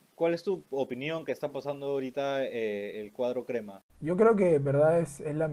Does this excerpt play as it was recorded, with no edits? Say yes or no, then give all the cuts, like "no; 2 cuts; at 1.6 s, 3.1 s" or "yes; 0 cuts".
no; 1 cut; at 3.9 s